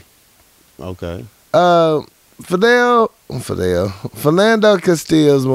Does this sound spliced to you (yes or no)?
yes